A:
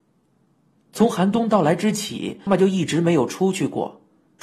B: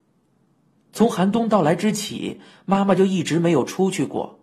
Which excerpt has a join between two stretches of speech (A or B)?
A